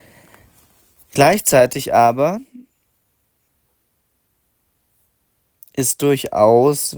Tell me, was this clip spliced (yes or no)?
no